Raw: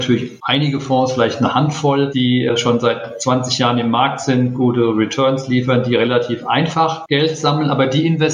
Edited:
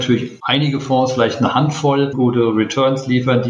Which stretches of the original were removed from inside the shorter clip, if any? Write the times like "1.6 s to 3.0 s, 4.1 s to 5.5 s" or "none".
2.1 s to 4.5 s